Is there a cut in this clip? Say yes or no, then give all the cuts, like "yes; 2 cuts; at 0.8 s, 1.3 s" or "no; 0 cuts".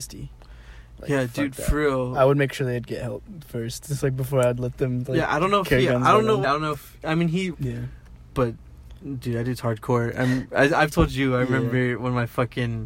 yes; 2 cuts; at 6.4 s, 7.5 s